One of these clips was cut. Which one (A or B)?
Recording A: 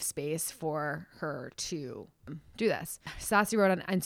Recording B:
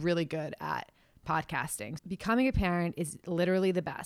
B